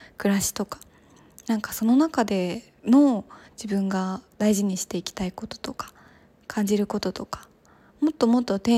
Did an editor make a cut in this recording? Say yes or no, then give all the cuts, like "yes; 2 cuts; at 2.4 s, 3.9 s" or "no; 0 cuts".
yes; 1 cut; at 2.8 s